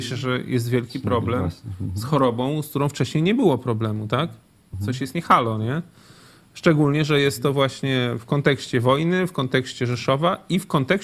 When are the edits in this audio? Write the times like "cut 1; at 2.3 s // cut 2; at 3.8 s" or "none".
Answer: none